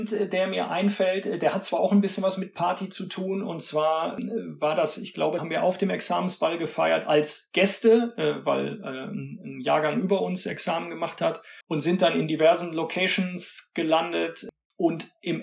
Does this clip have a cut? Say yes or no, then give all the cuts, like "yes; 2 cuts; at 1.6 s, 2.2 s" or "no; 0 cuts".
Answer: yes; 2 cuts; at 5.4 s, 11.6 s